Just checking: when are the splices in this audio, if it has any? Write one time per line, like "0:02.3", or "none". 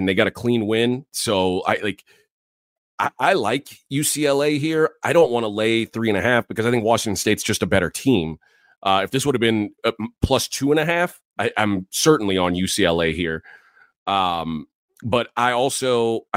0:01.1